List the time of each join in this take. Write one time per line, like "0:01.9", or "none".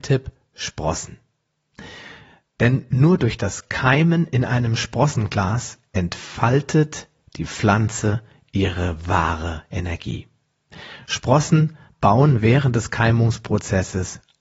none